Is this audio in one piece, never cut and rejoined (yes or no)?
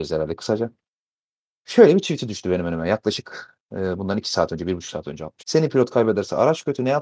no